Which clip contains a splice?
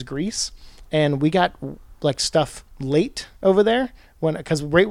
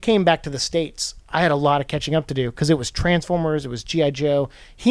first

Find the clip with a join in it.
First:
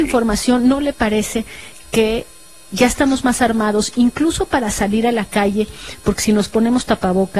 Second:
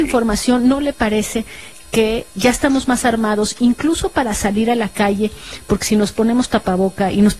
second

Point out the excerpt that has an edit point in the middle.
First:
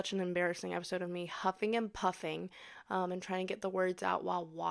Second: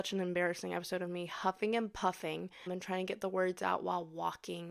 second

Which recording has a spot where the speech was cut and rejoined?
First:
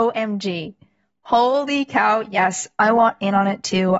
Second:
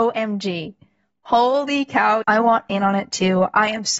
second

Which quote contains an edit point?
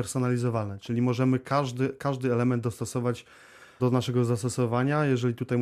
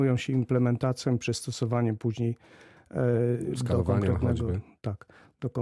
first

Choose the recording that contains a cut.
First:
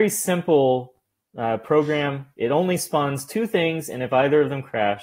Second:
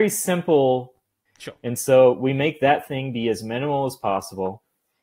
second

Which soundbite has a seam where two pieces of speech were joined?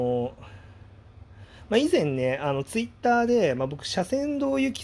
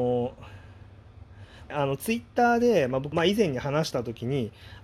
second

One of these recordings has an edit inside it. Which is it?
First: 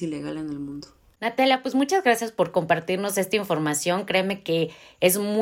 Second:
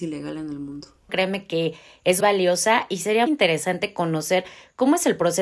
second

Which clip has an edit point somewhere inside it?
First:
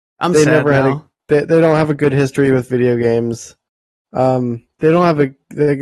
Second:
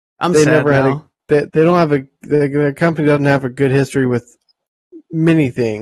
second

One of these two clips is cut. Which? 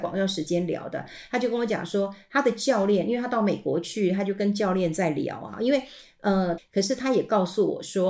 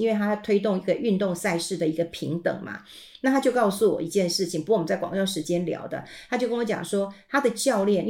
first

